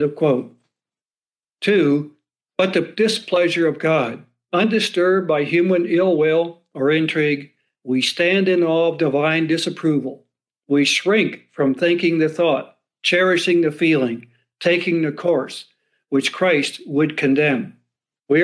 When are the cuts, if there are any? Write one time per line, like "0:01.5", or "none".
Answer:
0:01.4